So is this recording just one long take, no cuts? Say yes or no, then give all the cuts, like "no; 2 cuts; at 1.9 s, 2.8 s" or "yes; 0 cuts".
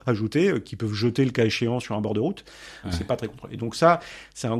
no; 1 cut; at 2.8 s